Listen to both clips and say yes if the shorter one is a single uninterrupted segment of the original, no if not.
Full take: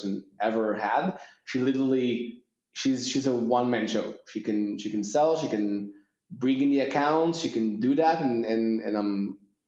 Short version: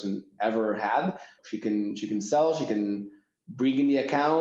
no